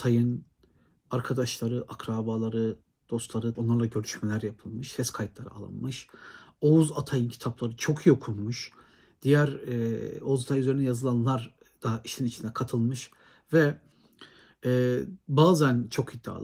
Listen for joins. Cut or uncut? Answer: cut